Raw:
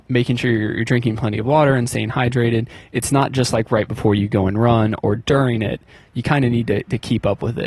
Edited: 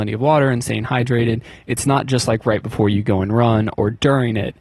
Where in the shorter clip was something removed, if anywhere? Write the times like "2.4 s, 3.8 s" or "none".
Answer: none